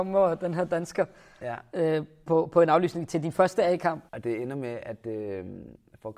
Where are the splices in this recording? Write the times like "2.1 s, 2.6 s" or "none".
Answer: 4.1 s